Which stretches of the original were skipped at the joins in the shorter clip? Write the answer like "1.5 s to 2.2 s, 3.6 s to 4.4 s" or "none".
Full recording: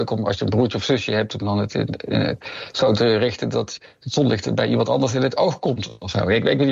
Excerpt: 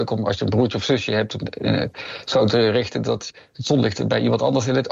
1.4 s to 1.9 s